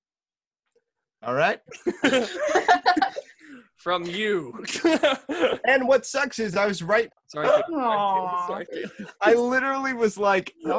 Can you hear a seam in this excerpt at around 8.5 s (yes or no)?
no